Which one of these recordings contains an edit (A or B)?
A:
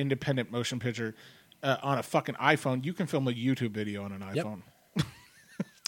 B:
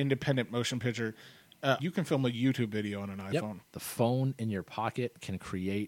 B